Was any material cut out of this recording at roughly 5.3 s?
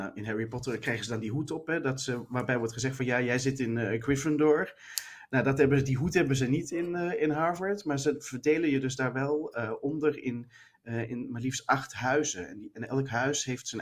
no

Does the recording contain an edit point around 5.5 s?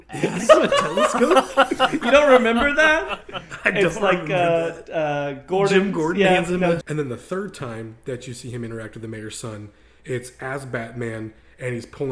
no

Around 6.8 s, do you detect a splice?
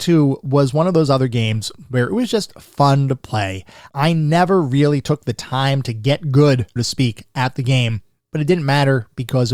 yes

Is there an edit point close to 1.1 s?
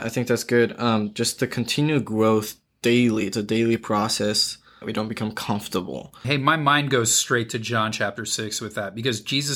no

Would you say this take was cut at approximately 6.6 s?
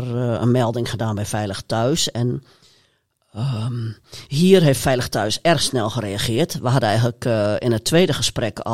no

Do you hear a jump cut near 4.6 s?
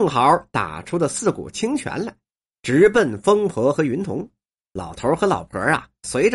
yes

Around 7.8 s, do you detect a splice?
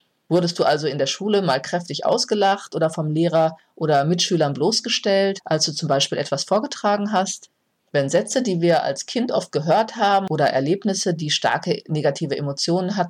yes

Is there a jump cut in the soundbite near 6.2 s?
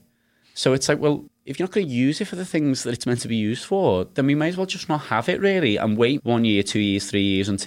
yes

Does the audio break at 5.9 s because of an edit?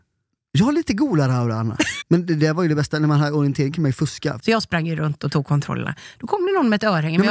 no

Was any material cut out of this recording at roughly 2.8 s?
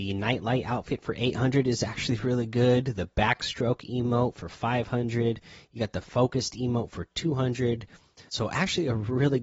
no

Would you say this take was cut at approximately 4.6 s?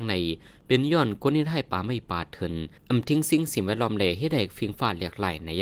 no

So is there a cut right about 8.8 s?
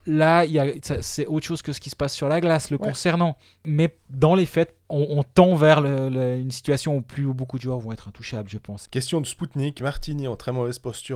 yes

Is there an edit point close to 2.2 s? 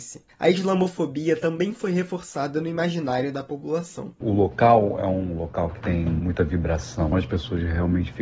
no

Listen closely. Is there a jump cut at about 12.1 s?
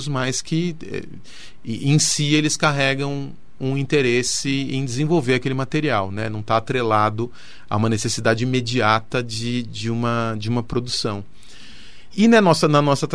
yes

